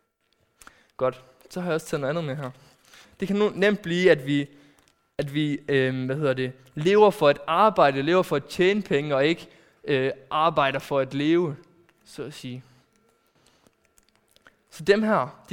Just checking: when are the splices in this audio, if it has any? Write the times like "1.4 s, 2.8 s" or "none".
3.0 s